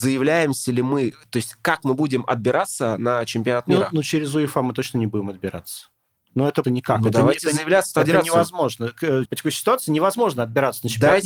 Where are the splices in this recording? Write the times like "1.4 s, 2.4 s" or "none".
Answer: 6.6 s, 8.0 s, 9.2 s